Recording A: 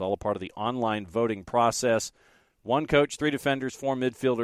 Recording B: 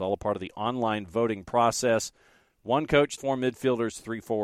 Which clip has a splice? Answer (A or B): B